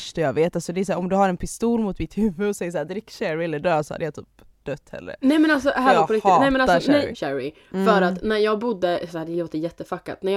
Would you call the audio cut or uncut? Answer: cut